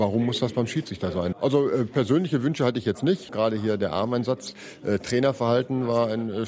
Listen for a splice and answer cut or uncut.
cut